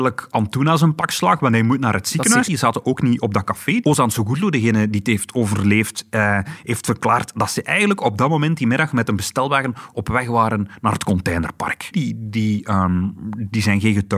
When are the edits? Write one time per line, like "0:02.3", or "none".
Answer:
0:02.4
0:03.8
0:11.9